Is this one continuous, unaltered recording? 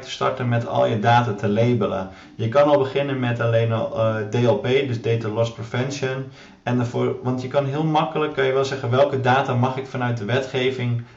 yes; 0 cuts

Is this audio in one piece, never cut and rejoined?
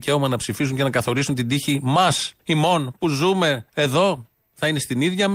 no; 2 cuts; at 2.4 s, 3.7 s

